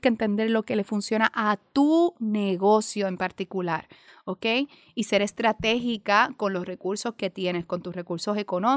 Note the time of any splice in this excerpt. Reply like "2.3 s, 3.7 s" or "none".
none